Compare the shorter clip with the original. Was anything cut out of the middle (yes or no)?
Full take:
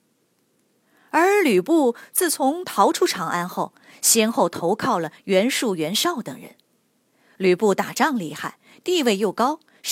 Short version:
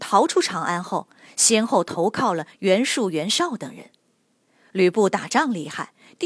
no